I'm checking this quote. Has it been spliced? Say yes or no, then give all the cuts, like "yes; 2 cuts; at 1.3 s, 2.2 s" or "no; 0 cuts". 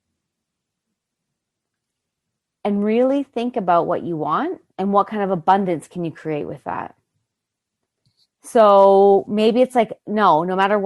yes; 2 cuts; at 4.7 s, 8.3 s